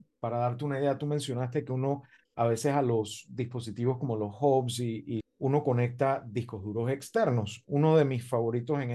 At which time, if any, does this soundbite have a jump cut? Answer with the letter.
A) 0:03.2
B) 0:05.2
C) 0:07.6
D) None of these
B